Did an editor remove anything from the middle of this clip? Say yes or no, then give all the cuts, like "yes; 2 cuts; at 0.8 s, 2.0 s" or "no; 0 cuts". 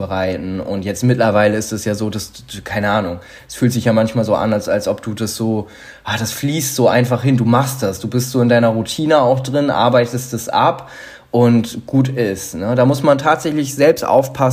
no; 0 cuts